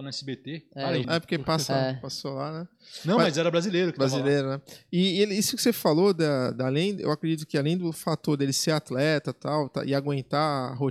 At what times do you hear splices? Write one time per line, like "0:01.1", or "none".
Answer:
0:01.0